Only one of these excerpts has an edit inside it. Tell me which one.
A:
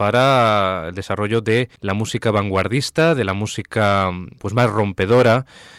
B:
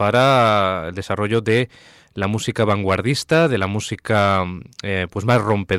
A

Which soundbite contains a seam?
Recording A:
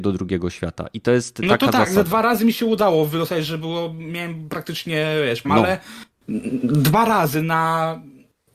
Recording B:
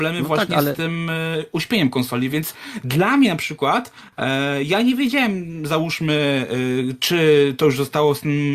A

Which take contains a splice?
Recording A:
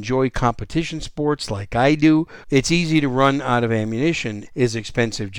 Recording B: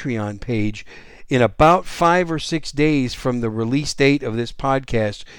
A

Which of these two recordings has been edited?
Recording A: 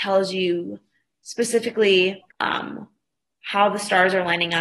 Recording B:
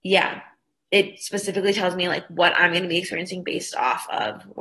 A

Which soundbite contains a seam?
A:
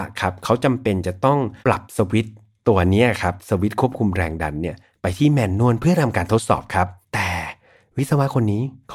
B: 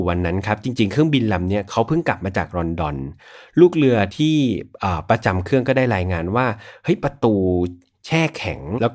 A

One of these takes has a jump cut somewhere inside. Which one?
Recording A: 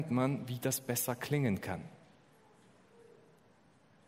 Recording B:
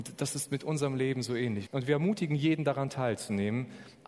B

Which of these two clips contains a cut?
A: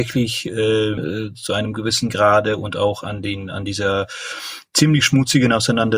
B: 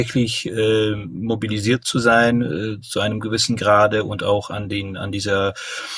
A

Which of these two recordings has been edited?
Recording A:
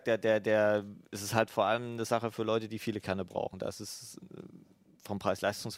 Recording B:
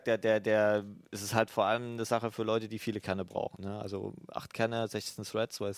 B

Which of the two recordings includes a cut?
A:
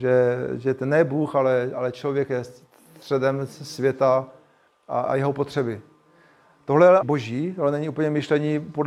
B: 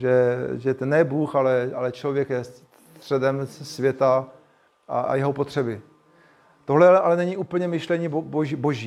A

